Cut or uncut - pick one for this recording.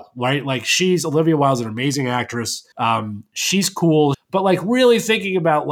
cut